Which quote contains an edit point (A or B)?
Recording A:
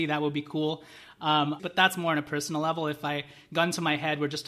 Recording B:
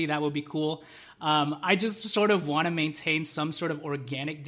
A